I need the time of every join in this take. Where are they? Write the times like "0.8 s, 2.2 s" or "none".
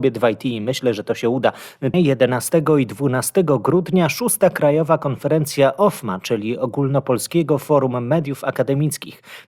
1.9 s